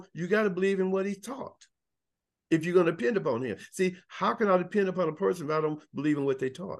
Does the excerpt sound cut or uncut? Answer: uncut